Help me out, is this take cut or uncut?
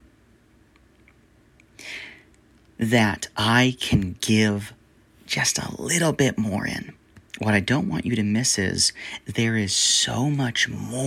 cut